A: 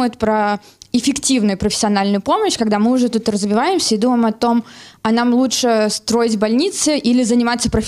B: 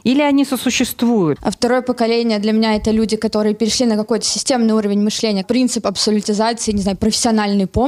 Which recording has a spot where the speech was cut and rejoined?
B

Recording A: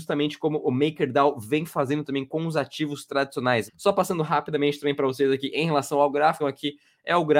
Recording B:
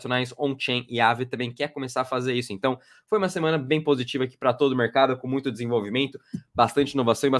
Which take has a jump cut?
A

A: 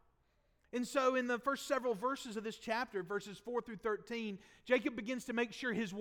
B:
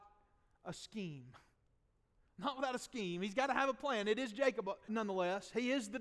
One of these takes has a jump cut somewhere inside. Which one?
B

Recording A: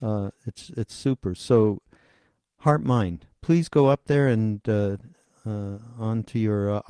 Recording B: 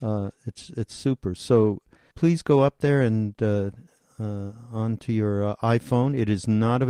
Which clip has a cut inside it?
B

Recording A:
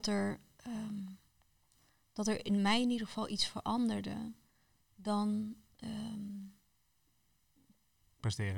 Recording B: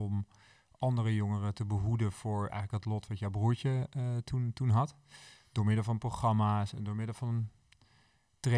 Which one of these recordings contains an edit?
A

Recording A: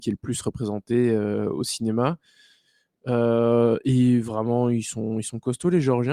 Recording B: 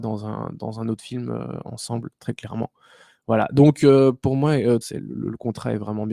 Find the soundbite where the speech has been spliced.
B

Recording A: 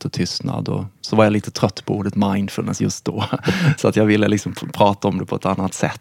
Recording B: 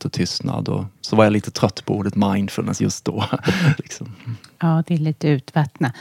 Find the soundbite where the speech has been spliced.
B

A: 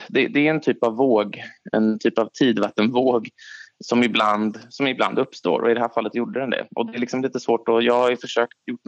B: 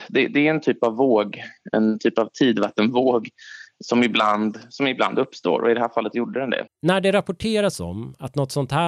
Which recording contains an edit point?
B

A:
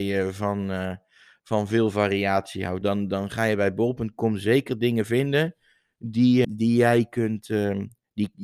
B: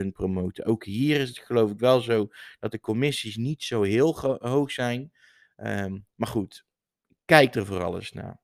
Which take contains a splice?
A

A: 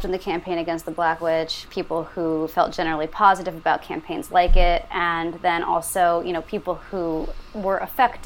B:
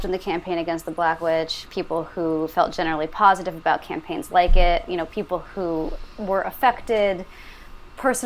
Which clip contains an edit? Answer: B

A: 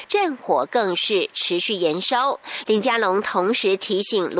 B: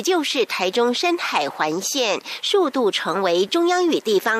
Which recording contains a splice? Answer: A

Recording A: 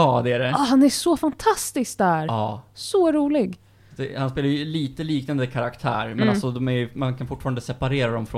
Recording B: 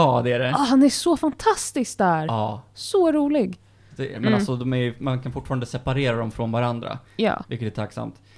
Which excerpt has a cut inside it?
B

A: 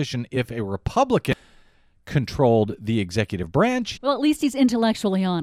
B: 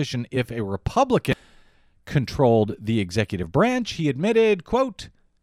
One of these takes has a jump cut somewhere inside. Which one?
A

